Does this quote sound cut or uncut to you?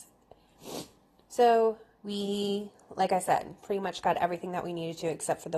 cut